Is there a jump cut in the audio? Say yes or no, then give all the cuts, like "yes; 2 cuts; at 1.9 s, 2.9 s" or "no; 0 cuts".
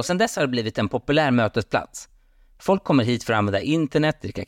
no; 0 cuts